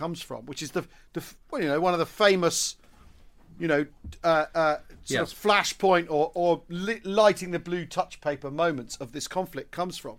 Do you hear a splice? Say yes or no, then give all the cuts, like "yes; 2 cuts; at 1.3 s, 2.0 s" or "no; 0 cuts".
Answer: no; 0 cuts